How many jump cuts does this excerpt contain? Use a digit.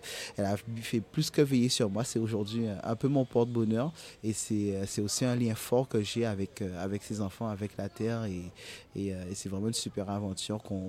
0